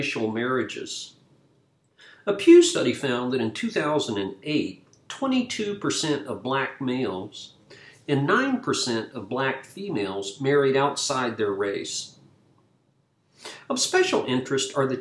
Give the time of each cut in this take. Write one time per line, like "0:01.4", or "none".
none